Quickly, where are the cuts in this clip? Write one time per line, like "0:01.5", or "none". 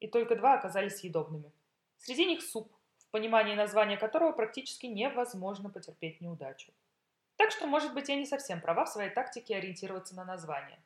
none